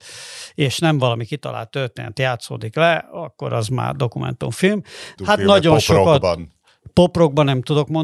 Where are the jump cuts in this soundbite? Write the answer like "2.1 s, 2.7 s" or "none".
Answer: 5.2 s